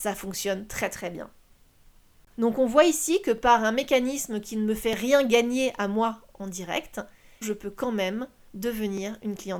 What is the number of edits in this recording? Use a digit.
2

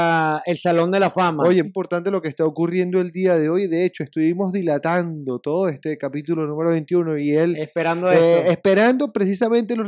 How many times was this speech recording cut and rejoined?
1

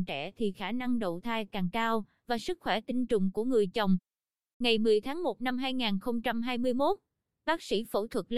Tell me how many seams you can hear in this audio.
1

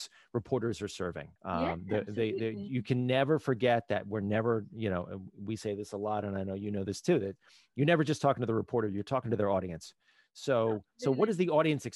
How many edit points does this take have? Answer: 1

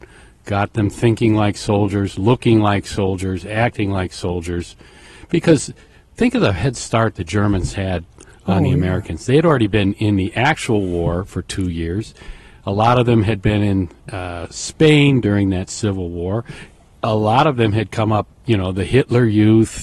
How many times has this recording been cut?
1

